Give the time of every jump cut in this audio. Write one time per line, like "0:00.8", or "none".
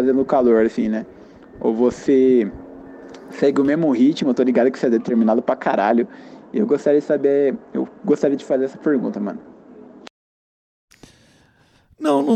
none